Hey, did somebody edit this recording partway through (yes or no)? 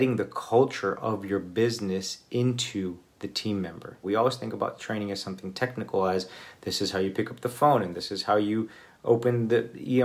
yes